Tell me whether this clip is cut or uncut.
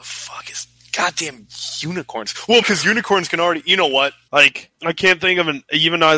cut